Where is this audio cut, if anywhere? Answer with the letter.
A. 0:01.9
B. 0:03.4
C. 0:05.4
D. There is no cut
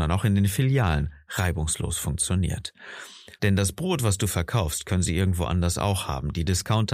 B